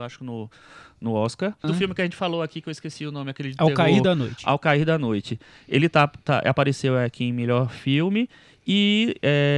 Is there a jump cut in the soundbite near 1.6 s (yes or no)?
yes